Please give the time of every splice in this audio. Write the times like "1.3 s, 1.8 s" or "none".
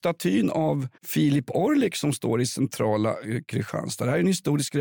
1.0 s